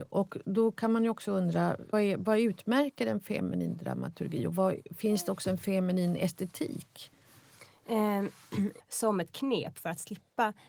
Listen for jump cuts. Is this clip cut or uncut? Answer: cut